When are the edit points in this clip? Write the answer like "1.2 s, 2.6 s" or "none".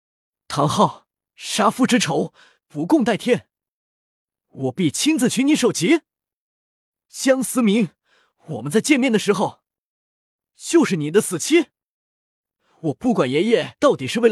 none